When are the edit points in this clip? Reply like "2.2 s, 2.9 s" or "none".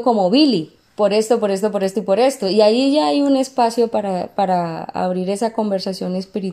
none

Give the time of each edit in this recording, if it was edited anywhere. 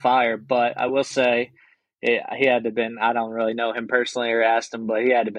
none

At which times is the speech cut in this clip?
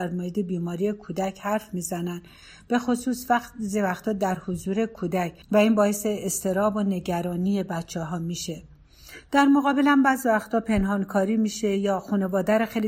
5.4 s

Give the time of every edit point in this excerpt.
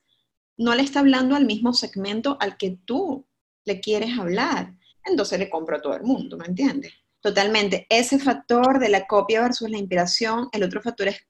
4.9 s, 7.2 s

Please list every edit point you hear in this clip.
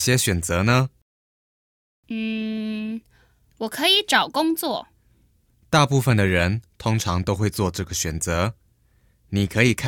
none

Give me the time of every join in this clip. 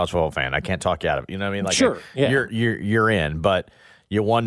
none

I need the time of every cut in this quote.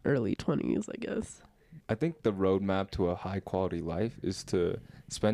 1.8 s

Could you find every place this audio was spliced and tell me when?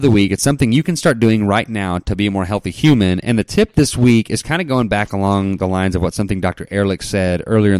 none

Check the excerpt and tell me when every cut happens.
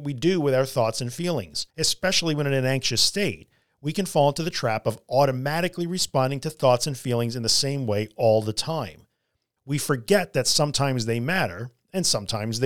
1.7 s, 9.6 s

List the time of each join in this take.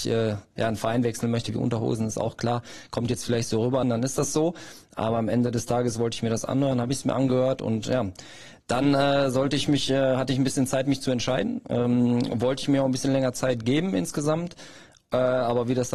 3.8 s

